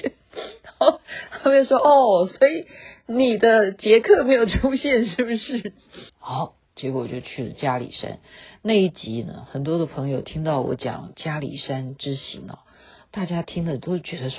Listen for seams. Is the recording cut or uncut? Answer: cut